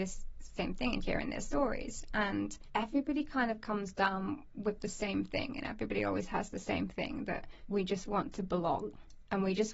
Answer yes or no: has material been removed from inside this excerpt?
no